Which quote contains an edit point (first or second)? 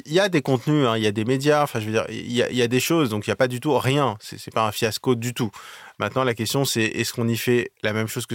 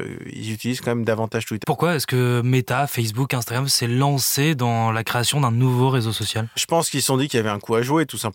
second